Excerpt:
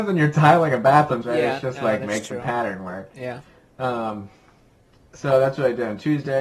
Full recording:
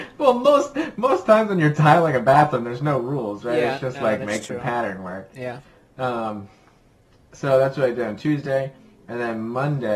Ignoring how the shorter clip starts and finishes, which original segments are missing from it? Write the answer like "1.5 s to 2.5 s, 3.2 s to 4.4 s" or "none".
2.6 s to 3.4 s